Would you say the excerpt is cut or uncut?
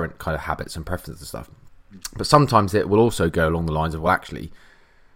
uncut